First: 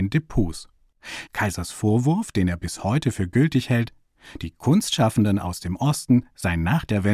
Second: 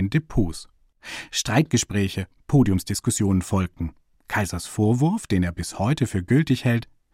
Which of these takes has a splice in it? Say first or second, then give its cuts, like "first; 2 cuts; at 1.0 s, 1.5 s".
first; 1 cut; at 1.3 s